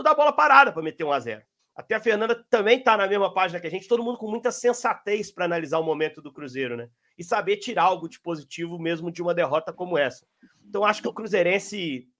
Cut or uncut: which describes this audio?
cut